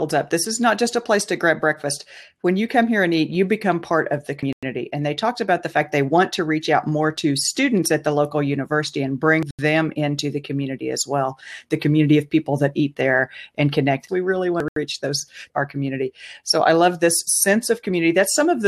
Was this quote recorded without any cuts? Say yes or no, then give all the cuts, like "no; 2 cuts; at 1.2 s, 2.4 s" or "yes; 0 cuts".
no; 2 cuts; at 14.1 s, 15.5 s